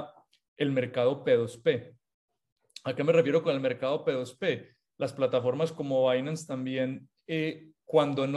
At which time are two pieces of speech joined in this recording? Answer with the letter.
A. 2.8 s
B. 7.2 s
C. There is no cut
C